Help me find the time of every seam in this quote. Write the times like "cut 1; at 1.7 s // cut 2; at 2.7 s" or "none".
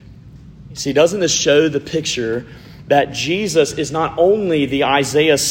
none